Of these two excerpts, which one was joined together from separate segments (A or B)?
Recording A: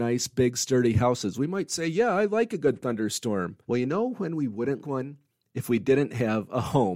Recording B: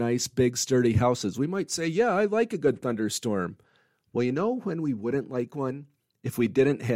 A